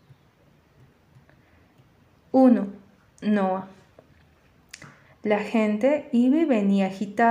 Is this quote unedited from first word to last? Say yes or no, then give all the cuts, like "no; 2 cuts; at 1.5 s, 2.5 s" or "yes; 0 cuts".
no; 1 cut; at 5.1 s